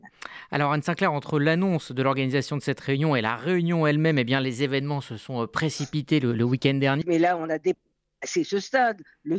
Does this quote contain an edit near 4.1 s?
no; 1 cut; at 7.0 s

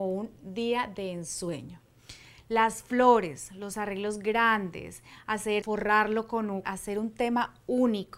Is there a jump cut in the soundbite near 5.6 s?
yes; 2 cuts; at 5.6 s, 6.6 s

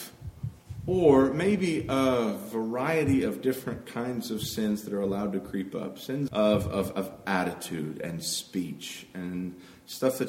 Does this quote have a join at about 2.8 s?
no; 1 cut; at 6.3 s

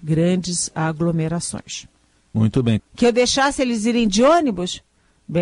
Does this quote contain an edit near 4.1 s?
no; 1 cut; at 2.8 s

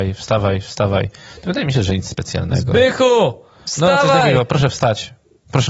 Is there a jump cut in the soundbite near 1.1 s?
no; 0 cuts

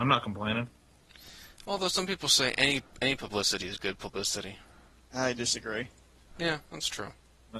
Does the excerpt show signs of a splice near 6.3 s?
yes; 1 cut; at 6.3 s

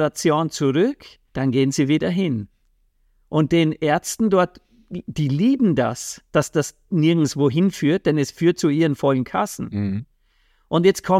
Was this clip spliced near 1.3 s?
yes; 1 cut; at 1.3 s

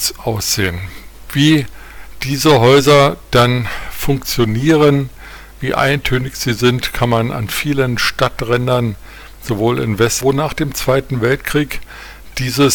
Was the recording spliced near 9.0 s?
no; 1 cut; at 10.2 s

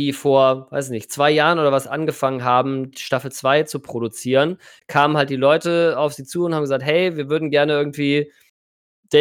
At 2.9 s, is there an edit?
no; 0 cuts

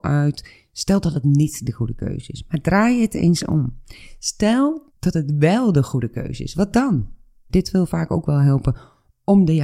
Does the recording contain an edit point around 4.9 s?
yes; 2 cuts; at 4.9 s, 7.5 s

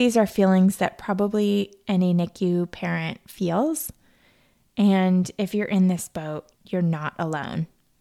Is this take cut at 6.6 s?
yes; 1 cut; at 6.6 s

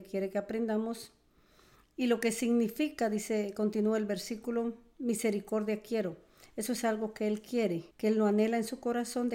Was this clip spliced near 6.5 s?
no; 1 cut; at 7.9 s

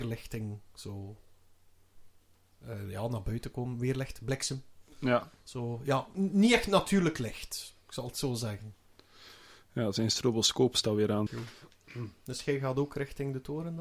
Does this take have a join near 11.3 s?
yes; 1 cut; at 11.3 s

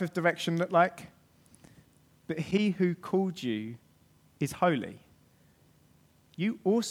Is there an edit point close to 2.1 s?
yes; 1 cut; at 2.1 s

